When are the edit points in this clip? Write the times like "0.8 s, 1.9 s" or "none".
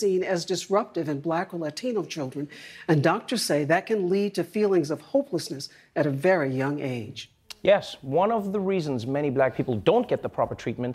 none